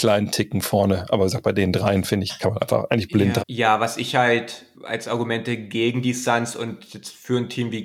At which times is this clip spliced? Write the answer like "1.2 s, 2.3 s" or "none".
3.4 s, 4.7 s